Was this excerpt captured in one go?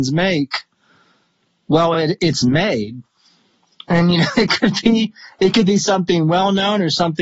yes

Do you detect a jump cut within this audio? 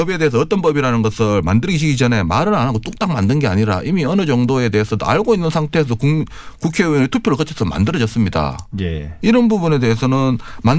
yes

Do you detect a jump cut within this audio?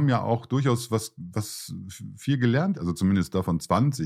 yes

